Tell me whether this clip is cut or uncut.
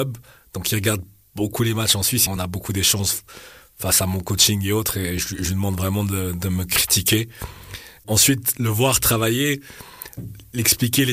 cut